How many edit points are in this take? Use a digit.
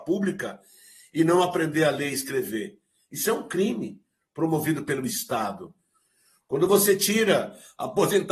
0